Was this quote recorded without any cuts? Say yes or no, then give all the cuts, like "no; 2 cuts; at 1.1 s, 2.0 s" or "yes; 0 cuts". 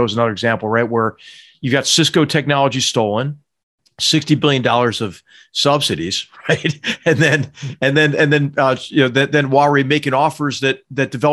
yes; 0 cuts